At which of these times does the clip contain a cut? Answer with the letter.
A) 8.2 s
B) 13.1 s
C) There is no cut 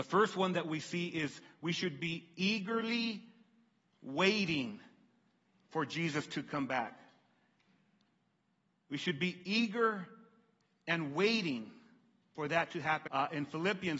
B